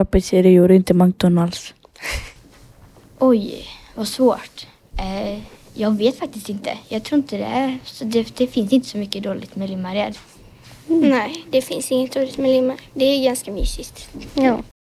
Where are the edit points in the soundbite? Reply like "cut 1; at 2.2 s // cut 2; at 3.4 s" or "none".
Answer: none